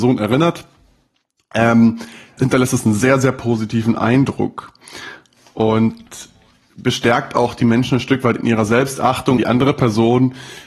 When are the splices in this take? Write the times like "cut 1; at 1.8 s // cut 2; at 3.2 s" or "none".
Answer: cut 1; at 2.4 s // cut 2; at 9.4 s